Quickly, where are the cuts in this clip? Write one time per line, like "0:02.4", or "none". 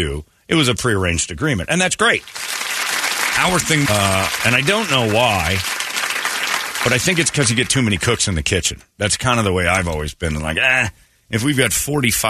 0:03.9